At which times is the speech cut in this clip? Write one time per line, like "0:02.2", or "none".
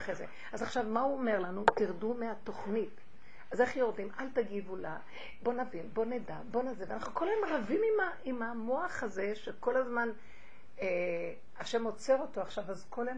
none